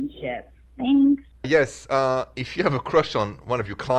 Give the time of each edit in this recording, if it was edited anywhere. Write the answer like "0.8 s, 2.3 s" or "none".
1.4 s